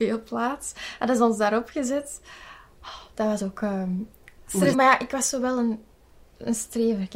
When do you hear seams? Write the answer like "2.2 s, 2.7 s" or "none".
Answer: 4.7 s

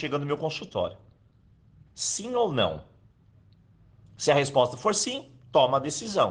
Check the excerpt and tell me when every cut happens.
1.9 s

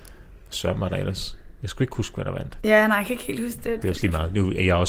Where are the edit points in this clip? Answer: 3.8 s

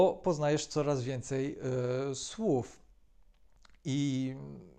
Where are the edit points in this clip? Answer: none

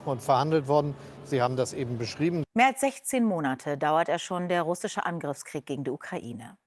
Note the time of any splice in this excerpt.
2.4 s

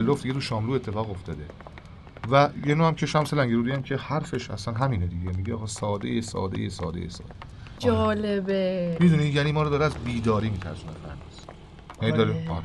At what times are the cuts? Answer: 7.8 s

